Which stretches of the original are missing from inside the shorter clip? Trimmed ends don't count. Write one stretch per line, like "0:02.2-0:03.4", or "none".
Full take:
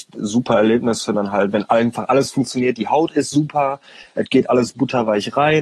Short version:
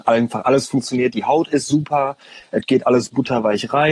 none